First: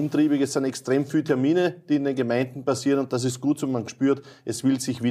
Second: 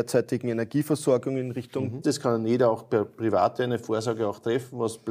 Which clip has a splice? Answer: second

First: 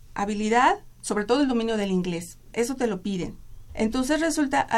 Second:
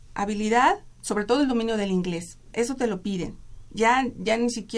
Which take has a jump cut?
first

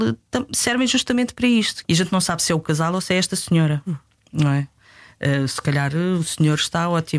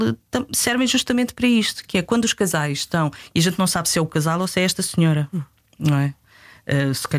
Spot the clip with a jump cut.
first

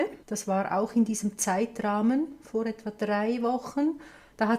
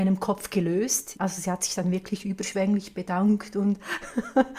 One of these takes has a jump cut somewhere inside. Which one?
second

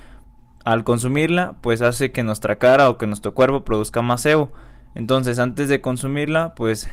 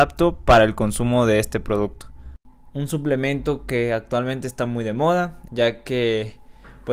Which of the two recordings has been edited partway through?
second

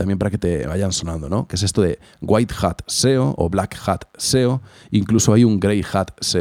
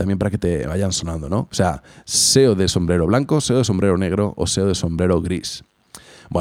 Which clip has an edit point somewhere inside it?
second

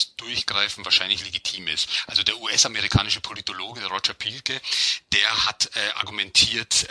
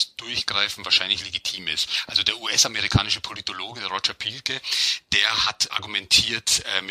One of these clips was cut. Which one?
second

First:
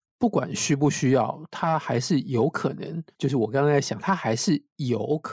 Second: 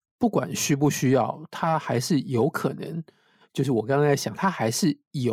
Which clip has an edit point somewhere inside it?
first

